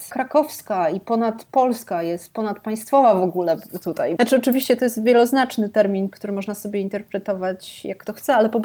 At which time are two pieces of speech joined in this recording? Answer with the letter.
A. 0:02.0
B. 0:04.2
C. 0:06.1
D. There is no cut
B